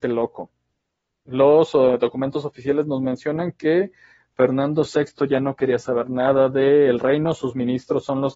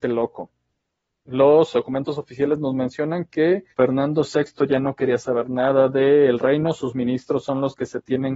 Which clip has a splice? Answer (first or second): second